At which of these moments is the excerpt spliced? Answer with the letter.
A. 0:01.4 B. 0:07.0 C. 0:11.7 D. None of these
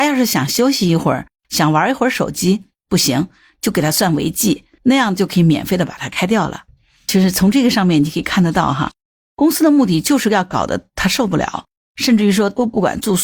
D